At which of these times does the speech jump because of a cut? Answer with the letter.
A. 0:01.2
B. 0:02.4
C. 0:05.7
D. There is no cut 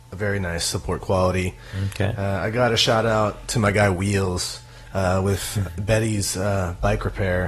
D